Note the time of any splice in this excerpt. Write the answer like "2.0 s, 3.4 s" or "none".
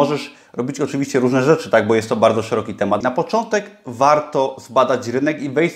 3.0 s